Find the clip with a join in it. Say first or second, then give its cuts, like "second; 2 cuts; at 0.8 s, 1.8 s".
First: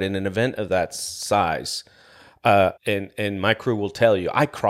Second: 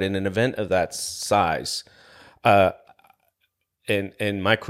first; 1 cut; at 2.8 s